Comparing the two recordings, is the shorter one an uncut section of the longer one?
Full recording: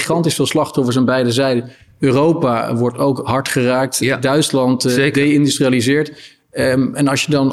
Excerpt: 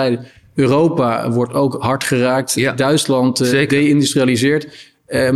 yes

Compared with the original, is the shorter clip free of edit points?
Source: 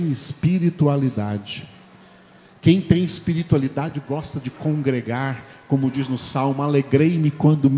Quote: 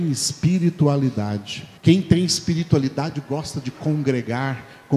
no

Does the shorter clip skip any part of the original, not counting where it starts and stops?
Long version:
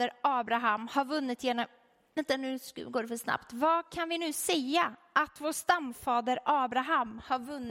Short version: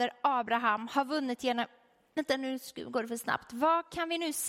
no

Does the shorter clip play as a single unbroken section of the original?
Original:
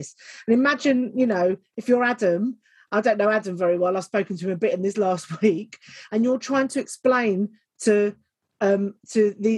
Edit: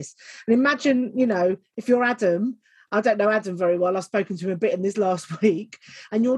yes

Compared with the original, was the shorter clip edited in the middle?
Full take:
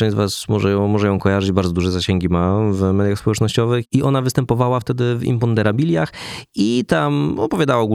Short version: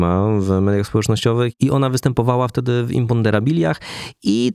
no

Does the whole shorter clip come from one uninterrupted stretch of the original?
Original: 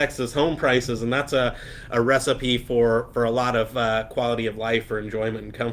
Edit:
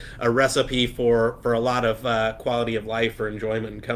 yes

